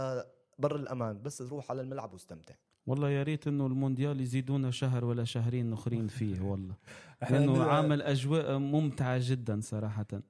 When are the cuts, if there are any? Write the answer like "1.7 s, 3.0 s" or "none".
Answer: none

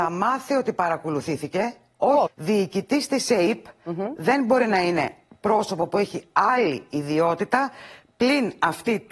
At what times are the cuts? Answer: 2.3 s

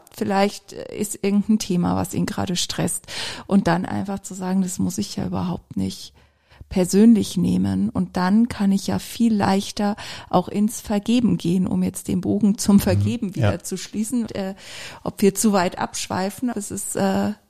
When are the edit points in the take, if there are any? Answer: 14.3 s, 16.5 s

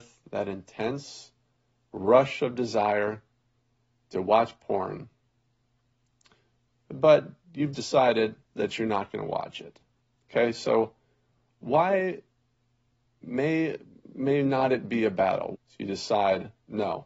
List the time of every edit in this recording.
10.2 s, 15.5 s

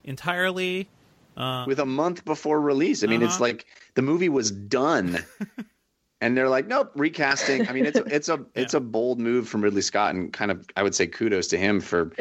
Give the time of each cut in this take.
none

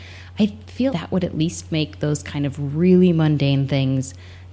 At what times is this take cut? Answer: 0.9 s

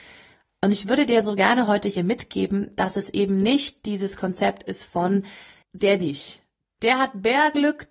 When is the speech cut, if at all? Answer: 5.6 s

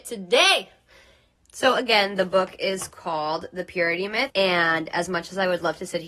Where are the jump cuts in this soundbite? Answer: 1.4 s, 4.3 s

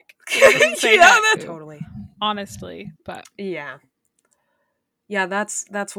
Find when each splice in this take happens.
1.3 s, 2.9 s

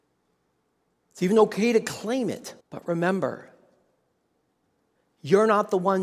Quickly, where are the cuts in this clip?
2.6 s

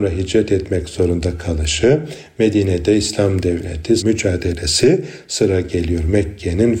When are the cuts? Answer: 4.0 s

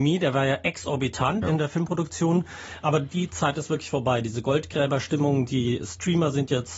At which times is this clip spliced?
1.4 s

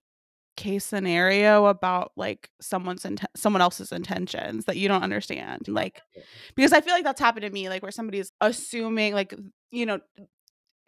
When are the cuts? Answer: 5.7 s, 8.3 s

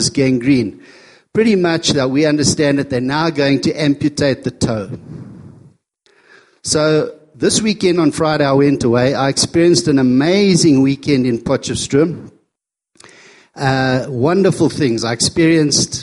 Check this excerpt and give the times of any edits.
none

